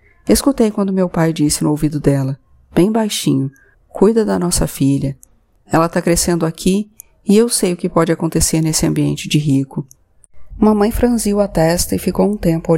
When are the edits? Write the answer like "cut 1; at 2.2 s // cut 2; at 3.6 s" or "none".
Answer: cut 1; at 3.7 s // cut 2; at 10.5 s